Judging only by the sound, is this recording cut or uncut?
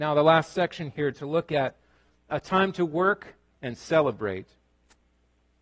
cut